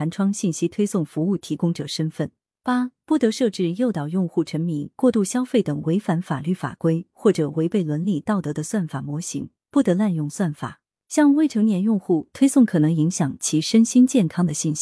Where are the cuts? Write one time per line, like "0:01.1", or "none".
0:09.7
0:10.9